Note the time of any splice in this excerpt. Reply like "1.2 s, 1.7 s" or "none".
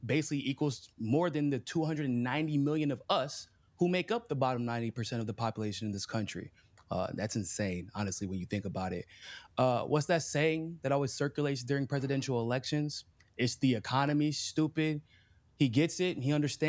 15.5 s